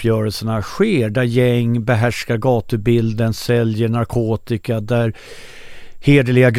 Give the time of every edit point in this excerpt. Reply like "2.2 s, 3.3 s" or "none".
none